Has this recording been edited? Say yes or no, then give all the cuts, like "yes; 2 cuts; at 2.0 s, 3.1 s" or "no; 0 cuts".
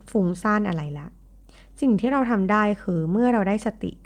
no; 0 cuts